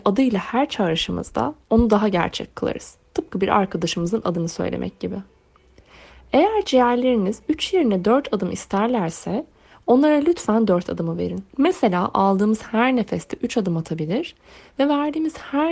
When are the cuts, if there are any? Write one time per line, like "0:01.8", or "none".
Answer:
0:11.5